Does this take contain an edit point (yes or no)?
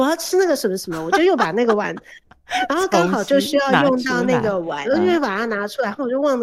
yes